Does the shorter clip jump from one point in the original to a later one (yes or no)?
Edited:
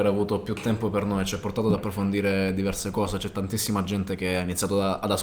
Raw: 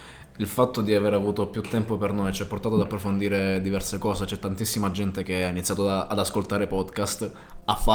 no